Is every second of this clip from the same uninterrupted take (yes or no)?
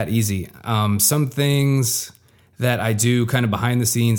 yes